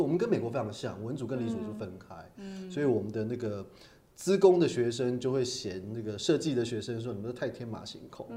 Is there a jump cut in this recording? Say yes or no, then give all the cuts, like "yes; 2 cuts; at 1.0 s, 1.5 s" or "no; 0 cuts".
no; 0 cuts